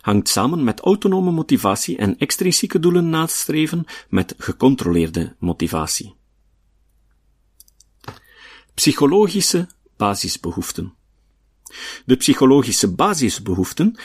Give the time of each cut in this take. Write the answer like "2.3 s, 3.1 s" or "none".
none